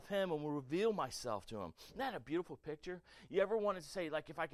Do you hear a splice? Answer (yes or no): no